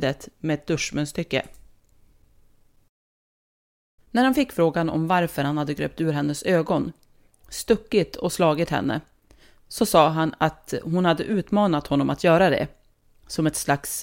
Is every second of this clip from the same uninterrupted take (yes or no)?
no